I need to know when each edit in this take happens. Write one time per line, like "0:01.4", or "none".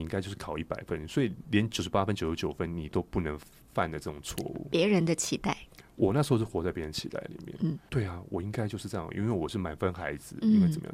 0:07.9